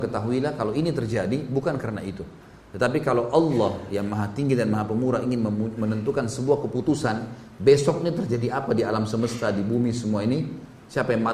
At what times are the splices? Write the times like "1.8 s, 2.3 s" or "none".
none